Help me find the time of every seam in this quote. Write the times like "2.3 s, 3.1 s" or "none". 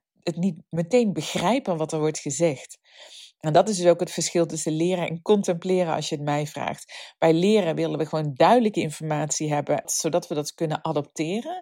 9.8 s